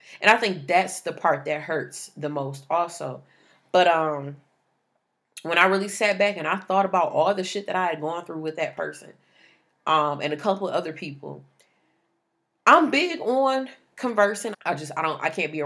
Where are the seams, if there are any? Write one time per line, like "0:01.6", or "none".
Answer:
0:14.5